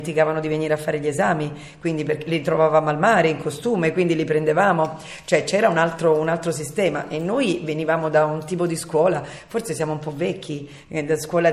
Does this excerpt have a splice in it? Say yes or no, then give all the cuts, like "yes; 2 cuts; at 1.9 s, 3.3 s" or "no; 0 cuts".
no; 0 cuts